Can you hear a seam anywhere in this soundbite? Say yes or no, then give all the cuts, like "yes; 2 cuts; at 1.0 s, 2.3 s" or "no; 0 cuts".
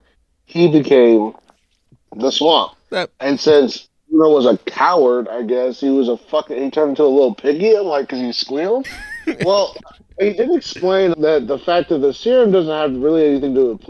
yes; 2 cuts; at 8.8 s, 11.1 s